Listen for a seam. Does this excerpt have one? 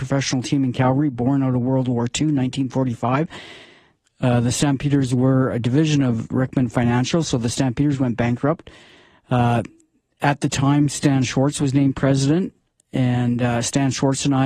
yes; 1 cut; at 4.0 s

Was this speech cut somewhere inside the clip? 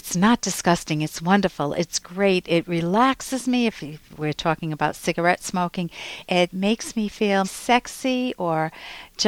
yes; 2 cuts; at 6.2 s, 7.4 s

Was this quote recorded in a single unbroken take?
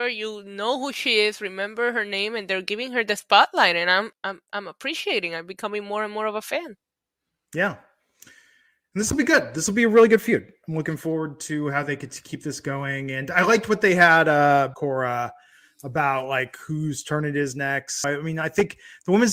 no; 3 cuts; at 4.1 s, 14.7 s, 18.0 s

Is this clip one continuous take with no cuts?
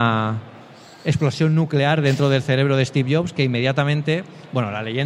yes; 0 cuts

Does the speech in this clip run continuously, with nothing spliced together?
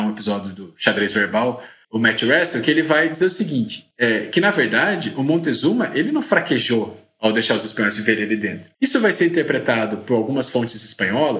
no; 2 cuts; at 1.8 s, 8.7 s

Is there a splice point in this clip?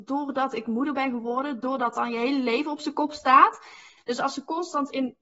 yes; 1 cut; at 4.0 s

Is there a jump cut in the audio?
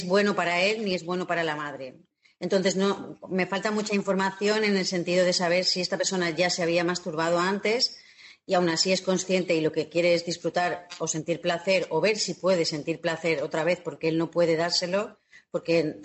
no; 0 cuts

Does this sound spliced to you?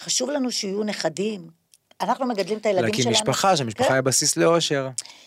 no; 0 cuts

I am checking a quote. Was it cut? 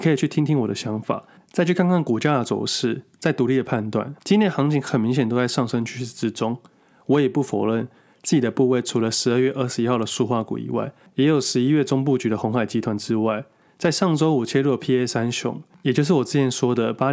yes; 1 cut; at 4.2 s

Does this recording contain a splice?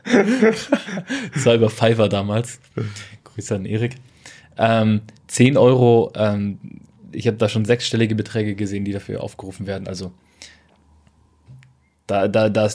no; 0 cuts

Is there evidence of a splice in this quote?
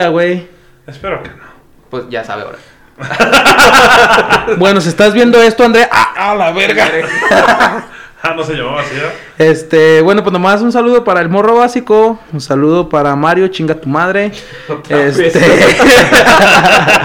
no; 0 cuts

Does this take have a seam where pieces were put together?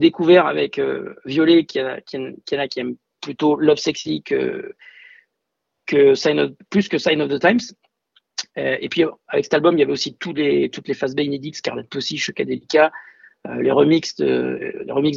no; 0 cuts

